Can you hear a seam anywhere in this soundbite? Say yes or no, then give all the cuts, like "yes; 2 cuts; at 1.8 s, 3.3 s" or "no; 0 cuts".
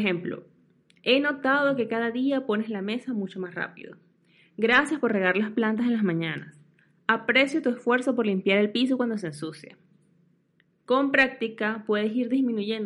no; 0 cuts